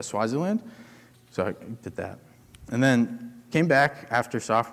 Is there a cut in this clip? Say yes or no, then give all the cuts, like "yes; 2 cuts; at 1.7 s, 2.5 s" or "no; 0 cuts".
yes; 1 cut; at 1.1 s